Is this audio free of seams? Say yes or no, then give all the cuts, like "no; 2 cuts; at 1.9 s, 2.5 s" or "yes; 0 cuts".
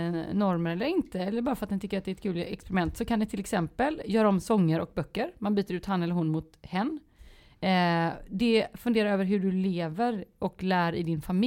yes; 0 cuts